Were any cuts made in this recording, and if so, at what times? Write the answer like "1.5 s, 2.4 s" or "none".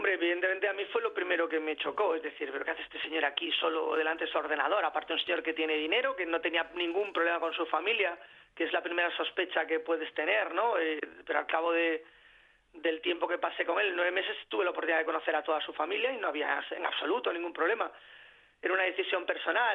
none